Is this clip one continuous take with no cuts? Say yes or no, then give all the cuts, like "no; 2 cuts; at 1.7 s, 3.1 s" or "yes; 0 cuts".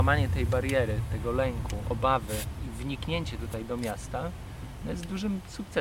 yes; 0 cuts